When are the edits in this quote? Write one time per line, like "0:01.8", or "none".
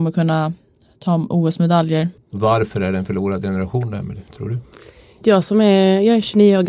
0:02.2
0:05.2